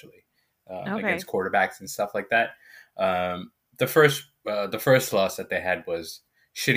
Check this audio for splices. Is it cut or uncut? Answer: uncut